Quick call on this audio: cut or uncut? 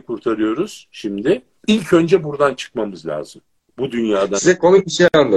cut